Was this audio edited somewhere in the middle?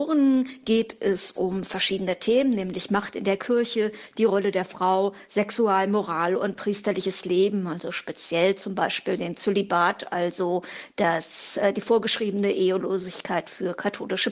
no; 0 cuts

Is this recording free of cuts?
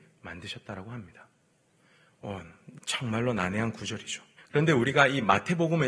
no; 1 cut; at 4.4 s

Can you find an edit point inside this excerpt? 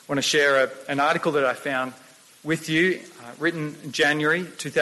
no; 0 cuts

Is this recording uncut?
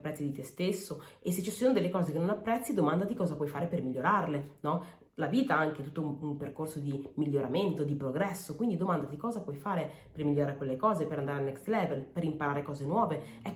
yes; 0 cuts

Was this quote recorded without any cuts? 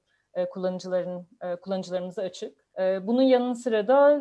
no; 1 cut; at 2.7 s

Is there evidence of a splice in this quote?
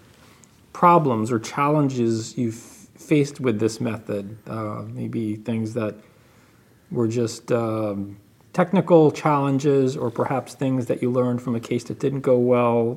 no; 0 cuts

